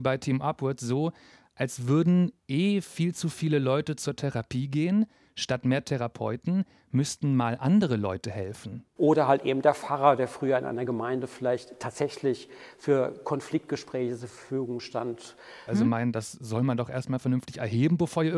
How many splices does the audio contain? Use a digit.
2